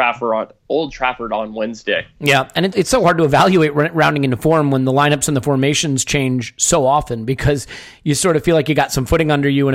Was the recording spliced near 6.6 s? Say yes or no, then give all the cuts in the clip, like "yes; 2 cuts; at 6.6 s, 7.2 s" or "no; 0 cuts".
no; 1 cut; at 2.7 s